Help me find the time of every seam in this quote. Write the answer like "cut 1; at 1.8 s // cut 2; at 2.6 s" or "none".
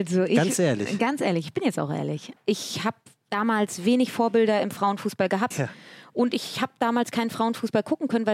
cut 1; at 2.4 s // cut 2; at 5.5 s